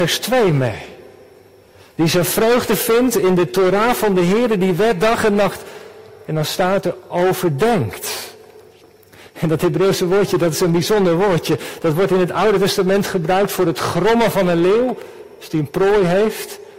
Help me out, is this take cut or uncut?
uncut